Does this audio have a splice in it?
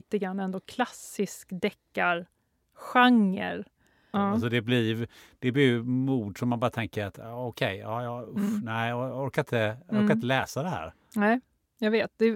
yes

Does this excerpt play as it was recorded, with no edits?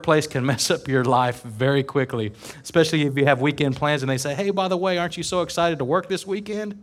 yes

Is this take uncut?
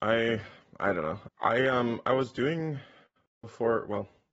no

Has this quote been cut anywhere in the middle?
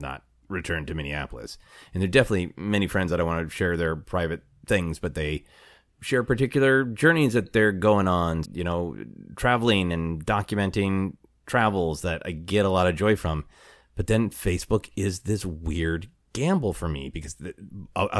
yes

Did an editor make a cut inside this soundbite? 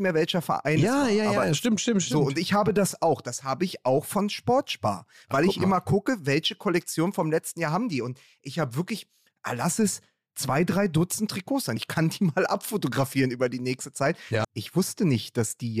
yes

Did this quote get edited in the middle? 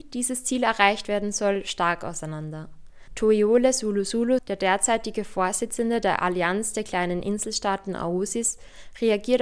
yes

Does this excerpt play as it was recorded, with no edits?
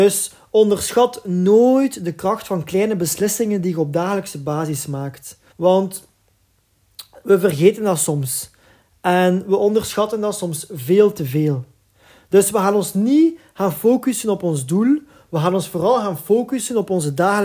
no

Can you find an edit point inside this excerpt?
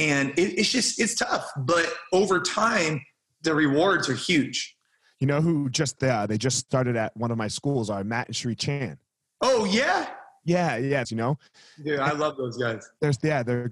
yes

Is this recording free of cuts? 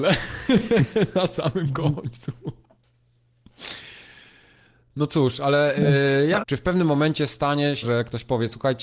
no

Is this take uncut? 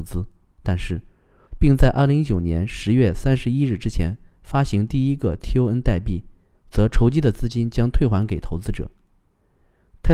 no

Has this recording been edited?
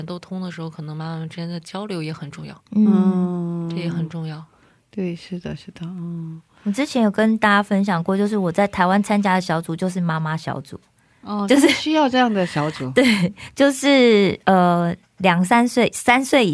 no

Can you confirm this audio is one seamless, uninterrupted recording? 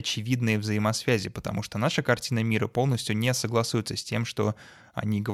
yes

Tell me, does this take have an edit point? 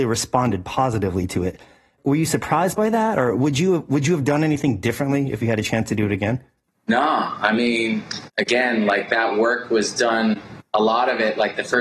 no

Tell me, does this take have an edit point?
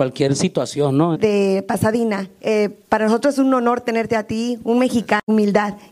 yes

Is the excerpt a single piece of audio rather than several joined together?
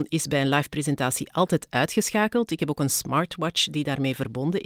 yes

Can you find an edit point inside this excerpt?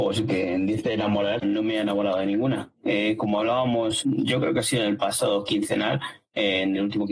yes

